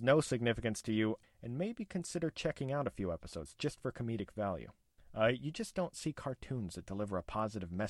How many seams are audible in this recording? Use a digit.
1